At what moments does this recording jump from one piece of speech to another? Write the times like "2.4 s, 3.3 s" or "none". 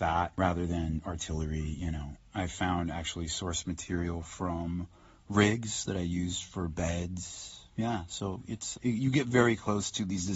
7.7 s, 8.7 s